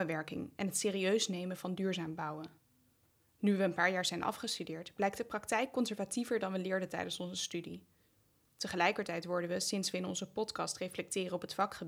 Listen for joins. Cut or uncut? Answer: uncut